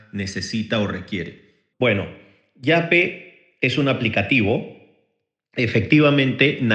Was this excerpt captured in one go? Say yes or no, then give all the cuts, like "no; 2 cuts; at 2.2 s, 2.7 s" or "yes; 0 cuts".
no; 1 cut; at 1.7 s